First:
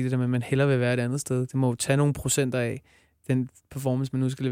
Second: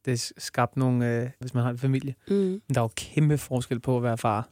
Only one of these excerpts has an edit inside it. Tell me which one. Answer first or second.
second